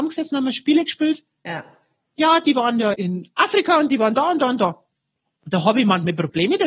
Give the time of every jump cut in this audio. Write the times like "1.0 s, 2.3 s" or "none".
2.9 s